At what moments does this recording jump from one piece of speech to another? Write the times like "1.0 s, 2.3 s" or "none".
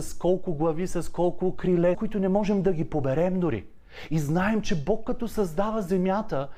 1.9 s